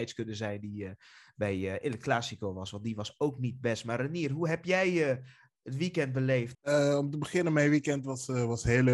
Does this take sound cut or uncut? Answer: cut